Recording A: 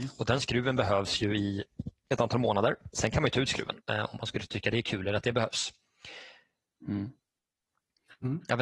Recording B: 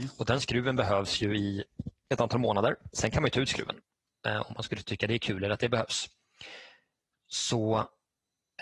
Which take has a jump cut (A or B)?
A